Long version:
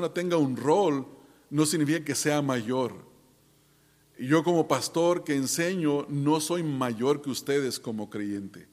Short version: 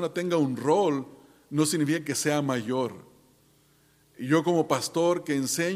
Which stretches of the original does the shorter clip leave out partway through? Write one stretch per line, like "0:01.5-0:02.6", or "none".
none